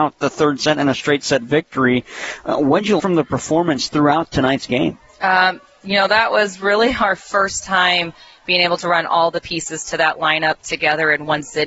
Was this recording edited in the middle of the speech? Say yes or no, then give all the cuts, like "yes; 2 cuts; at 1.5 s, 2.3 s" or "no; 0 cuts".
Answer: yes; 1 cut; at 3.0 s